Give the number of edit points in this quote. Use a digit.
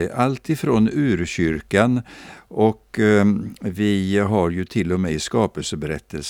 0